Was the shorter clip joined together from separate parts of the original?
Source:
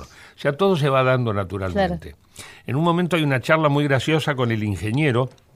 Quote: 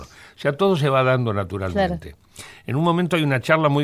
no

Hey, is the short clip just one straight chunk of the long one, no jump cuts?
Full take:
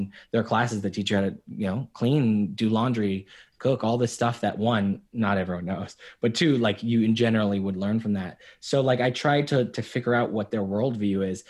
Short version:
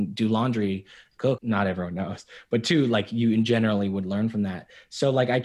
no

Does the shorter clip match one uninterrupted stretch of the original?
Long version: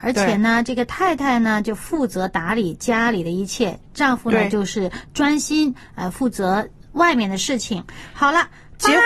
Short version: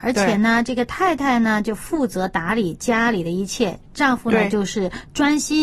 yes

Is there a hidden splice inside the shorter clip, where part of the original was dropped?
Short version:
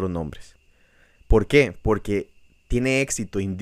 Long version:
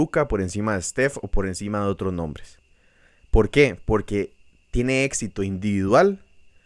no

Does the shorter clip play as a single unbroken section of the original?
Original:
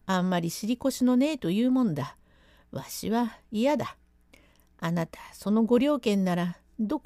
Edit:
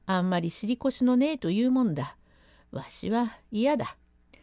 yes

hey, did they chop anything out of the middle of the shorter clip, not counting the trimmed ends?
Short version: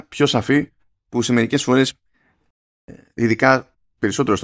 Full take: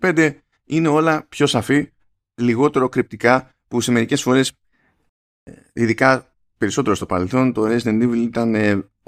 yes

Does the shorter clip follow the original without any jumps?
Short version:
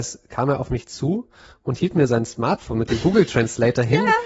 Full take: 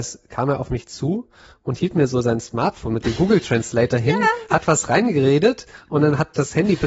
no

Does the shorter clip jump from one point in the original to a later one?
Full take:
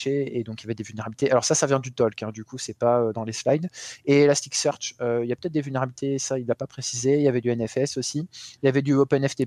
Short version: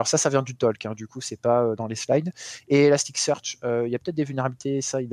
no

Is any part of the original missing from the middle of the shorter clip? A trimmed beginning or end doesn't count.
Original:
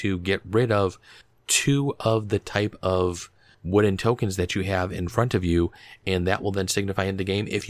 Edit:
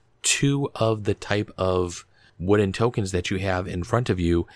no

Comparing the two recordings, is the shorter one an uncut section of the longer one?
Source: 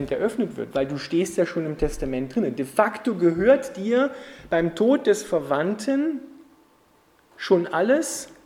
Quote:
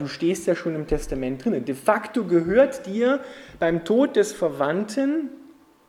yes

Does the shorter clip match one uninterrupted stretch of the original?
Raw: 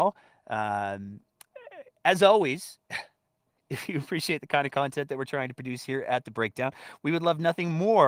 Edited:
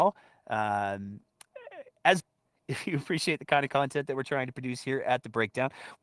no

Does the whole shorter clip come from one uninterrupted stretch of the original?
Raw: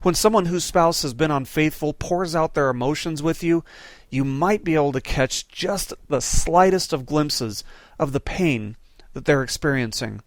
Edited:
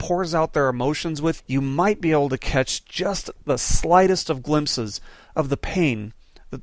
no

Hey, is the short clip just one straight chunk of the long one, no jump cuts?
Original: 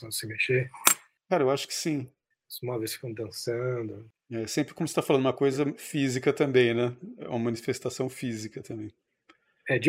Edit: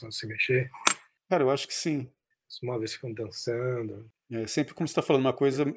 yes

